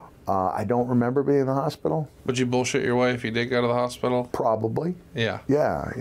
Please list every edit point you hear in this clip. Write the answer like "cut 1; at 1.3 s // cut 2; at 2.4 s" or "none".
cut 1; at 2.2 s // cut 2; at 4.3 s